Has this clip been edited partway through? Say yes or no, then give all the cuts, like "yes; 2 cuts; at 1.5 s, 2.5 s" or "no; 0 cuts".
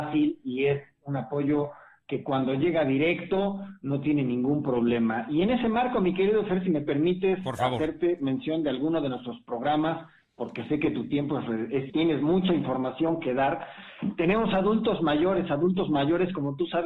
yes; 1 cut; at 11.9 s